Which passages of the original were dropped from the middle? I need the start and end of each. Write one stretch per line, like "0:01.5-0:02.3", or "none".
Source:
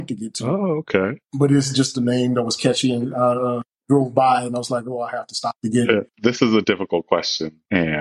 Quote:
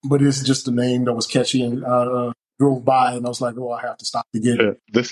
none